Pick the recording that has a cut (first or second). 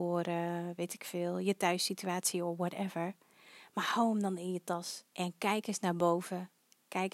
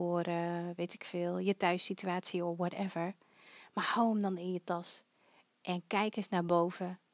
first